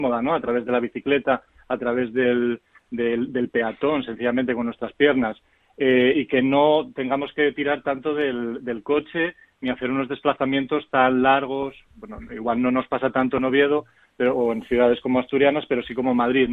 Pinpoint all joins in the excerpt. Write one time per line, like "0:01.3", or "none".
none